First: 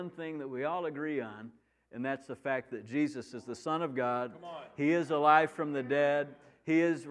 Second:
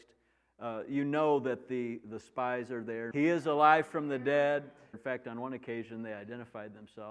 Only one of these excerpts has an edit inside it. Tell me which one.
second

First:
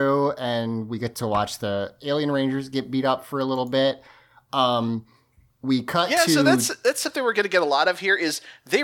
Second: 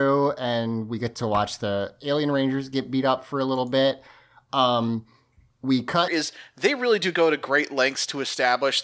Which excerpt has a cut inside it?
second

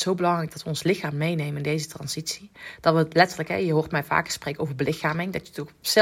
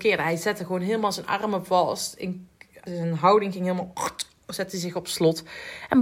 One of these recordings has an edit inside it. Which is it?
second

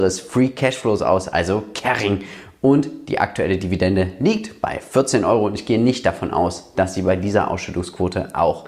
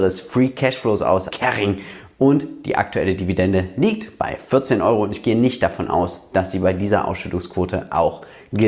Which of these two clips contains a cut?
second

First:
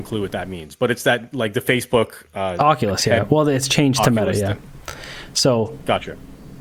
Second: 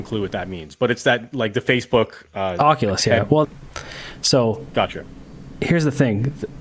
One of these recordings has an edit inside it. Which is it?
second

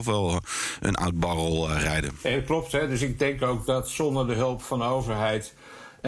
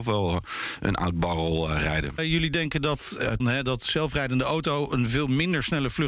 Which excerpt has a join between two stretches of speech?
second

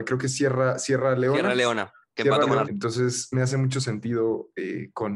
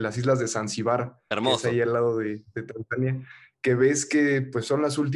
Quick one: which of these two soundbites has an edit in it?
first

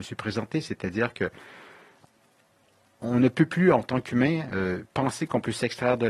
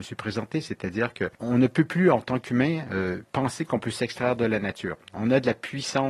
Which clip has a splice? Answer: second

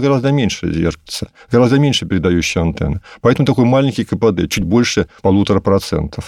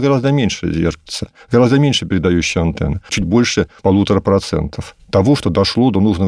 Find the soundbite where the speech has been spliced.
second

